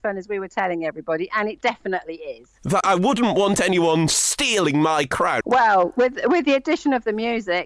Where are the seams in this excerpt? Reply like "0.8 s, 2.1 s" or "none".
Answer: 2.8 s, 5.4 s